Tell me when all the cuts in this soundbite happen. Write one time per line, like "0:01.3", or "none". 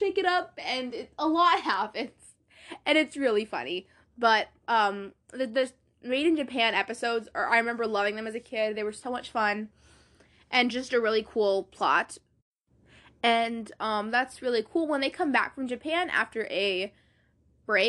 none